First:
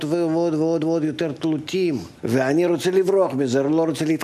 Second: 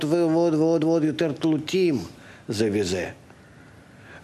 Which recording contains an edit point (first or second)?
first